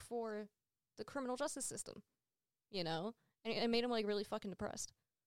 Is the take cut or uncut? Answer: uncut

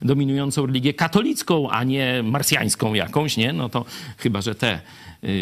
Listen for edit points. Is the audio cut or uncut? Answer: uncut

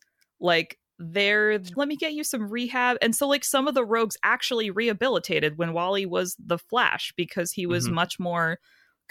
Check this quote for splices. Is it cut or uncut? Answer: cut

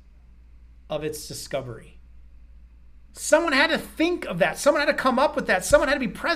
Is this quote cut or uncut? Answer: uncut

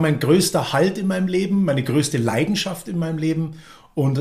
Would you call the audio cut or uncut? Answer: uncut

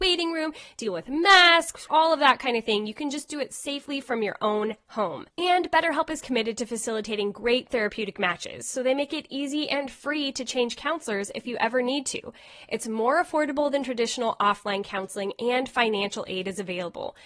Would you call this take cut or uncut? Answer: cut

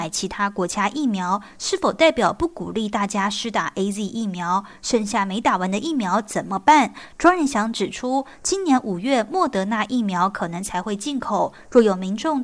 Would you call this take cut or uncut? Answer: uncut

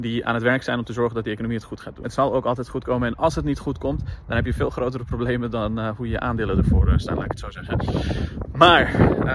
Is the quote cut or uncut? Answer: cut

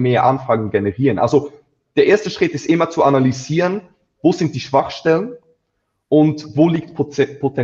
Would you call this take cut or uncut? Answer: uncut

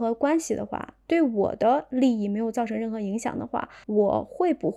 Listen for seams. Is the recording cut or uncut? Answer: uncut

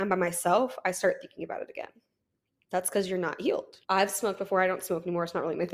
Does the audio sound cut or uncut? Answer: cut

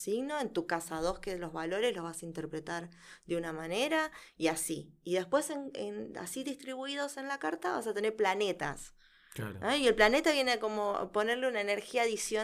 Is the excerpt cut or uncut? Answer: uncut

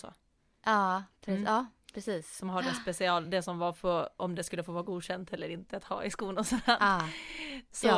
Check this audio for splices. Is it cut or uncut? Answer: uncut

